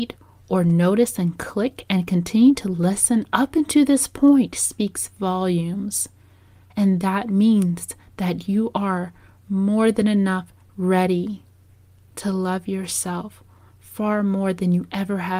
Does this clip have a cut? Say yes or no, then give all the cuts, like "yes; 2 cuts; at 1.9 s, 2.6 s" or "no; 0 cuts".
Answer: no; 0 cuts